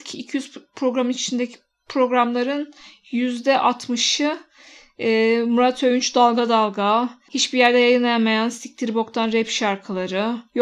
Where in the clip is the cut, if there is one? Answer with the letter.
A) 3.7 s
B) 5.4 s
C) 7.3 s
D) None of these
C